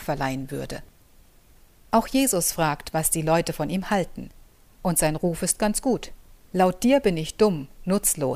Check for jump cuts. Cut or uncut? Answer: cut